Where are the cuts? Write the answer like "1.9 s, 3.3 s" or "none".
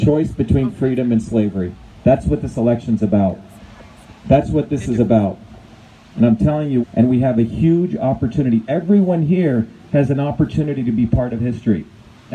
6.8 s